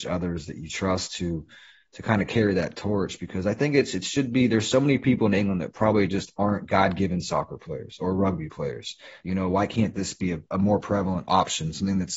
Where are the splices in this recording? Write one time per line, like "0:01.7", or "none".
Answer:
0:09.2
0:10.5